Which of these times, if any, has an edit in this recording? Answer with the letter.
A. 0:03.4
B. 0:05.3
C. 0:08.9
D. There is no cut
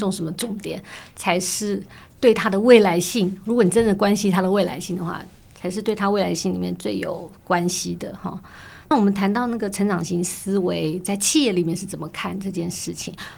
C